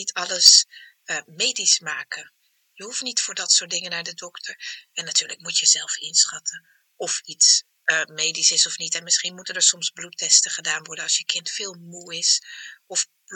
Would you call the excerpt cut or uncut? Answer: uncut